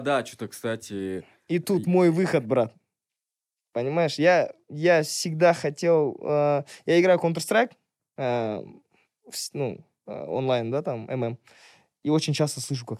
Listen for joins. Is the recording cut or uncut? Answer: uncut